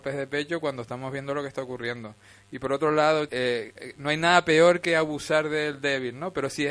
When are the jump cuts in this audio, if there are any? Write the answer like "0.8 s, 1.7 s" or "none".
3.3 s